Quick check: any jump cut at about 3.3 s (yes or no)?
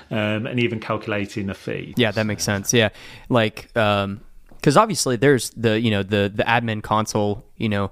no